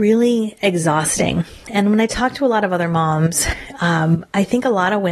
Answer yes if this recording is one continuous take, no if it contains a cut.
yes